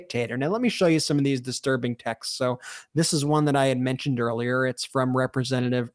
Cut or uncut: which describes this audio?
uncut